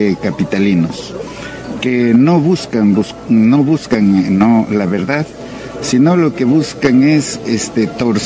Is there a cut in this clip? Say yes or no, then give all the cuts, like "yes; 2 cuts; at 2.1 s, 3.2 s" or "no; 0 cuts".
no; 0 cuts